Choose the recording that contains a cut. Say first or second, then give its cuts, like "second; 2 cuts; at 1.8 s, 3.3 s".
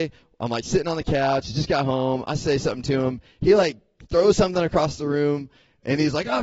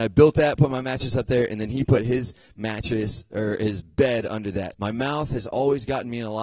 second; 1 cut; at 4.7 s